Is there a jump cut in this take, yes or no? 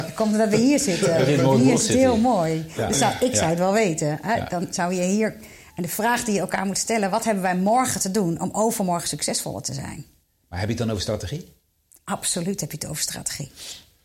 no